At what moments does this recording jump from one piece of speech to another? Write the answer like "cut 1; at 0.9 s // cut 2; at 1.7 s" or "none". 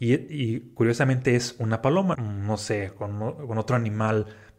cut 1; at 2.1 s